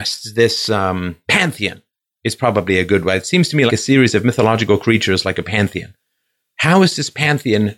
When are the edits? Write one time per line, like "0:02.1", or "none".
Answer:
0:03.7